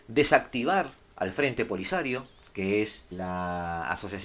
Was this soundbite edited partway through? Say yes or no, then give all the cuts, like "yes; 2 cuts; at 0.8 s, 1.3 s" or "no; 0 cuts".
yes; 1 cut; at 3.1 s